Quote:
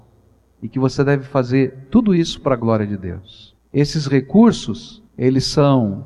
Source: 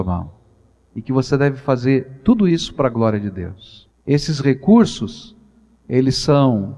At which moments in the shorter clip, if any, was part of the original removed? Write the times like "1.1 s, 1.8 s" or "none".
5.1 s